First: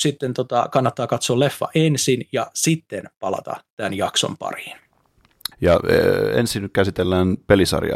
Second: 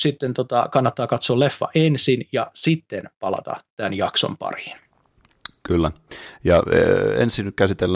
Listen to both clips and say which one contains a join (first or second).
first